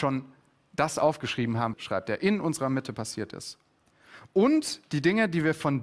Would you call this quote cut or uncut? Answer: cut